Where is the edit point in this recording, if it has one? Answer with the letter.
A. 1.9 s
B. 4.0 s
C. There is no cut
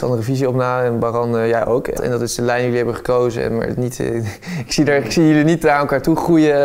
A